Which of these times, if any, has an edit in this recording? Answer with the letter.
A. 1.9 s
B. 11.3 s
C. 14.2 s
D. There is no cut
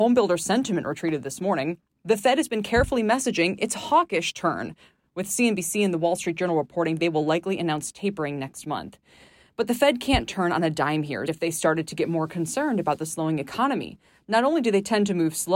B